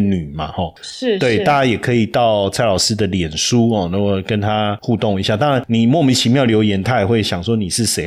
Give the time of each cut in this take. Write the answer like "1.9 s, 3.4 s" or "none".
none